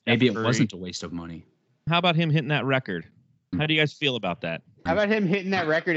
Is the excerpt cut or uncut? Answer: cut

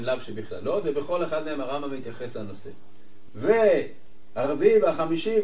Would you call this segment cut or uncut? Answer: cut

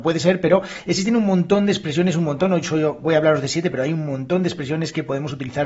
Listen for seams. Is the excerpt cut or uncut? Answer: uncut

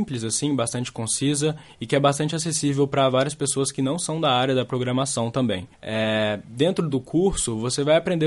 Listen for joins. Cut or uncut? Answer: cut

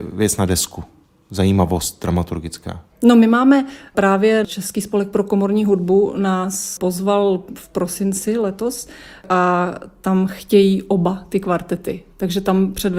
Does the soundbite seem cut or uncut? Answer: uncut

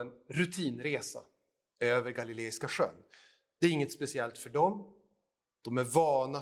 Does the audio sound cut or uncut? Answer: uncut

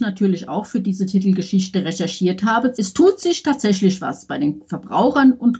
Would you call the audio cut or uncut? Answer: cut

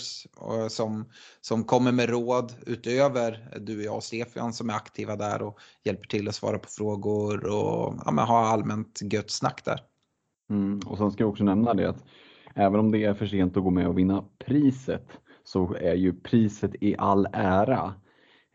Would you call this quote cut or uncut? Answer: uncut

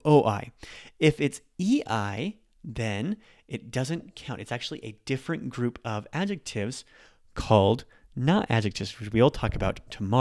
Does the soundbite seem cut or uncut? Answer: uncut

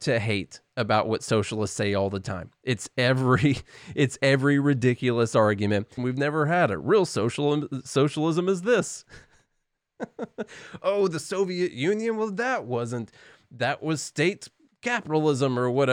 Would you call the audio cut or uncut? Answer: cut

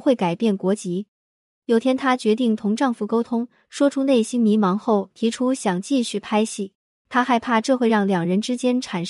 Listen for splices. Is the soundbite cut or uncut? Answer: cut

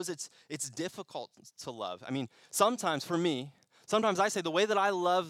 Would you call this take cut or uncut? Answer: uncut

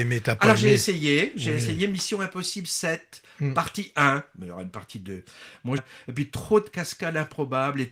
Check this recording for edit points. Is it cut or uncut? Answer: cut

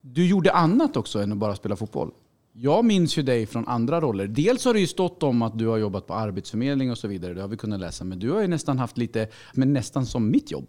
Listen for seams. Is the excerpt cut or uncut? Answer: cut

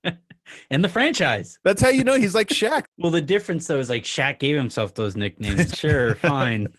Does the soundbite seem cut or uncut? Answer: cut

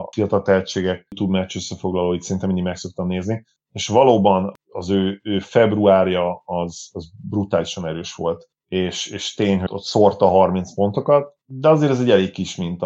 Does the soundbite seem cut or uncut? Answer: cut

